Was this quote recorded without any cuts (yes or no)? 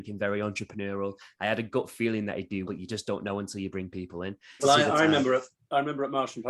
no